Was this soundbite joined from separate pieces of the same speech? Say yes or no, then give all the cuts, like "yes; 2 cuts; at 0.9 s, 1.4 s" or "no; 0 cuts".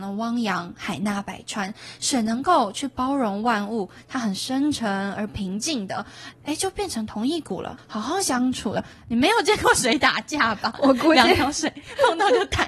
yes; 2 cuts; at 6.3 s, 7.8 s